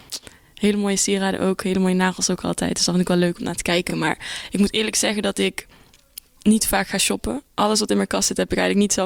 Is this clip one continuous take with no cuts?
yes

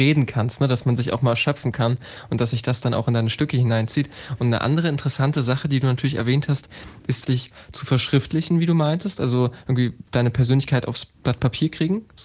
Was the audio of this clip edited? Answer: yes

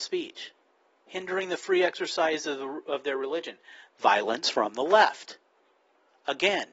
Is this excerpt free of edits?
no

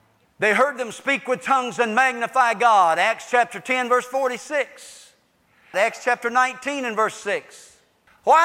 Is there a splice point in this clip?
yes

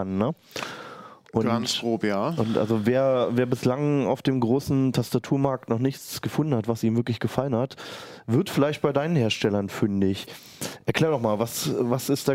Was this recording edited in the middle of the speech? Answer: no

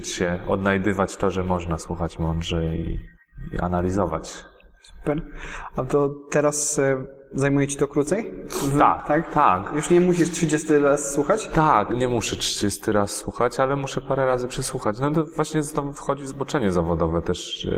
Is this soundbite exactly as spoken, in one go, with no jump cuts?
no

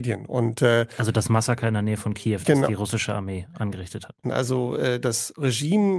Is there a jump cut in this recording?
yes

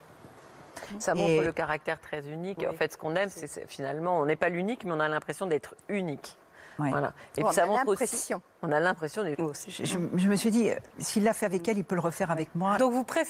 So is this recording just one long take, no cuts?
no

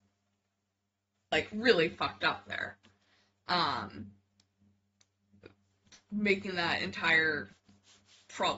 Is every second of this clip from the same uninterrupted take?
yes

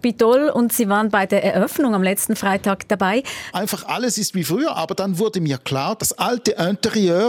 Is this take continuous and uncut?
no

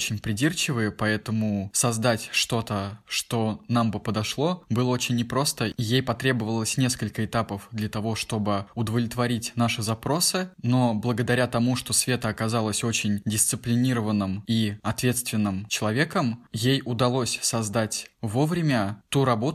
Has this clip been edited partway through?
no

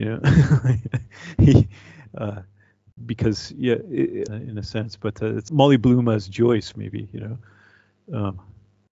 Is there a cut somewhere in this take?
yes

